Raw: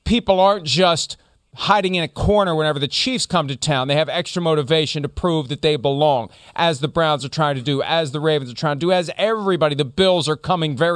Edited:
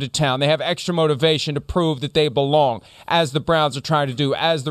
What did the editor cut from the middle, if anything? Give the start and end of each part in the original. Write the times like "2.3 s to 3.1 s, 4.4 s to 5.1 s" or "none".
none